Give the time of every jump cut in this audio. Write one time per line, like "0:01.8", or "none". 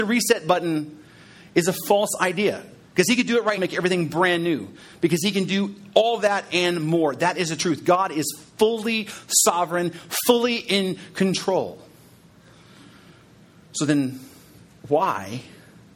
0:03.6